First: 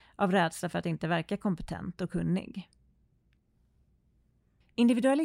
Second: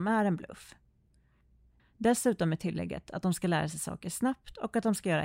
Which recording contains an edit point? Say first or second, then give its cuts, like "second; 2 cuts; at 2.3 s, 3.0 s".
second; 1 cut; at 1.8 s